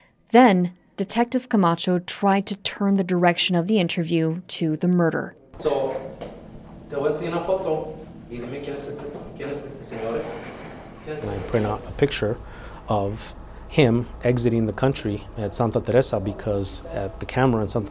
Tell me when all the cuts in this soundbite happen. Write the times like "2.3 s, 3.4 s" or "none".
5.6 s, 15.3 s

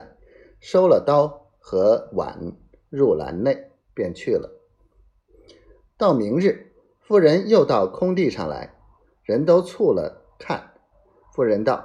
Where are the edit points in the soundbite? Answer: 3.8 s

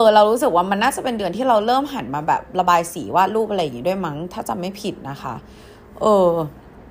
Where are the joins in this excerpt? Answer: none

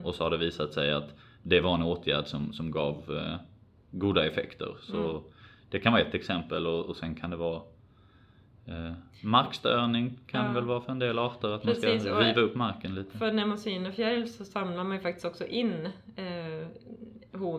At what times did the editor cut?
none

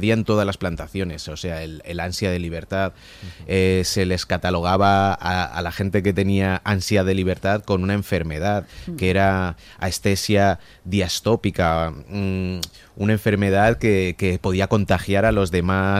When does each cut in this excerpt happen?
none

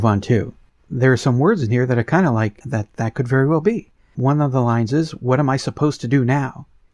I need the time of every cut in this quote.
none

